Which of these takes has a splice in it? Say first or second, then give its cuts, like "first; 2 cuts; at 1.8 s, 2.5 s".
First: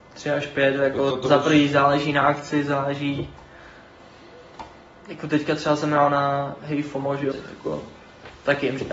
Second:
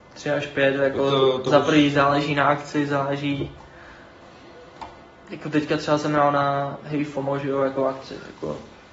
first; 2 cuts; at 1.1 s, 7.3 s